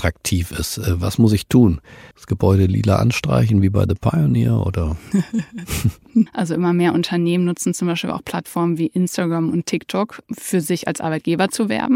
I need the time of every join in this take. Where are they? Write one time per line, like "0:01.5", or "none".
0:02.1
0:06.3
0:10.2